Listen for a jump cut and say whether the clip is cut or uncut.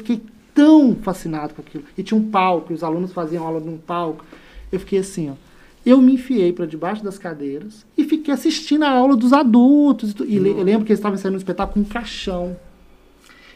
uncut